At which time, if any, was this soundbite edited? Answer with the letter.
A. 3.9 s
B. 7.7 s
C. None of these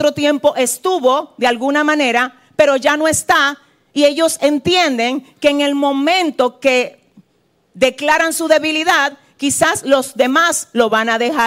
C